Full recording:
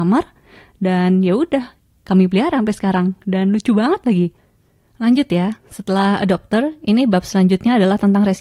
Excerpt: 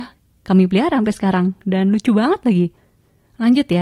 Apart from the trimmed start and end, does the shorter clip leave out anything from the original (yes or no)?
no